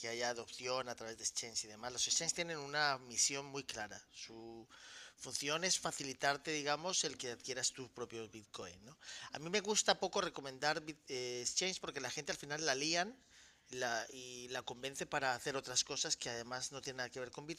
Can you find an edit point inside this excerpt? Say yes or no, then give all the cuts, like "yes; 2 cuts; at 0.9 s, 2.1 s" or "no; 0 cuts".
no; 0 cuts